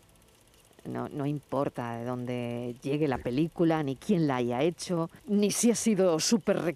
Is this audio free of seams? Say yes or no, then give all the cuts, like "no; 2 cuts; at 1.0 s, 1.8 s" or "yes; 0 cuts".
no; 1 cut; at 5.2 s